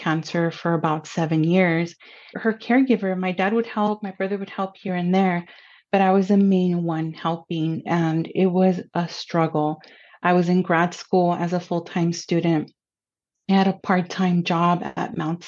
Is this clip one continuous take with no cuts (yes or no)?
no